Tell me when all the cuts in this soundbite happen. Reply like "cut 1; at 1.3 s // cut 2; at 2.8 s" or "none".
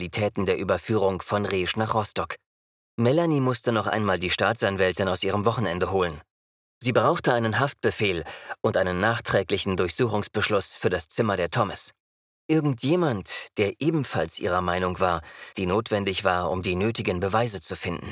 cut 1; at 12.3 s // cut 2; at 15.5 s